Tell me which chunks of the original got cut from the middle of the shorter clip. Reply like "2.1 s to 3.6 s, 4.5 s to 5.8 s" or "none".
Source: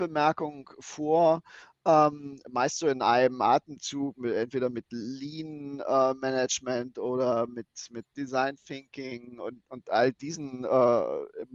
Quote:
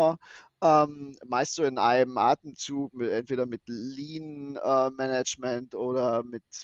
none